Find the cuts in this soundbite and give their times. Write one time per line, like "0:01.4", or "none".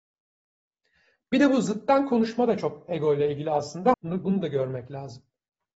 0:03.9

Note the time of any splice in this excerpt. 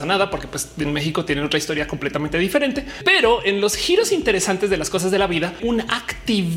0:05.6

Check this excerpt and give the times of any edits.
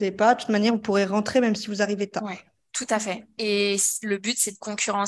none

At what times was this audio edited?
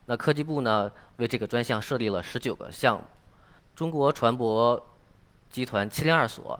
none

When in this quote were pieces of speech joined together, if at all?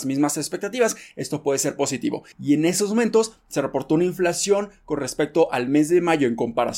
0:02.3

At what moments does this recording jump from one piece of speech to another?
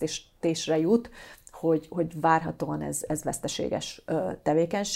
none

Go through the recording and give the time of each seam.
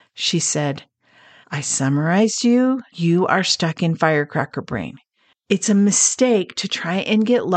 0:05.3

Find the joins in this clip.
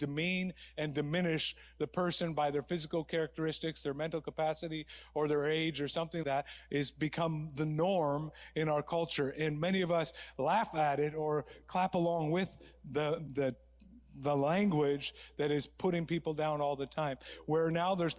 0:06.2
0:13.3

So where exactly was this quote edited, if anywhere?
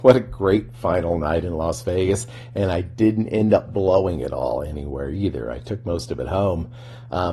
none

